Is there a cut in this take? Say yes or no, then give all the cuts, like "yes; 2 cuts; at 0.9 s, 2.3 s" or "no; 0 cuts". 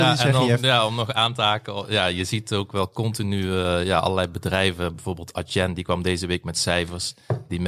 no; 0 cuts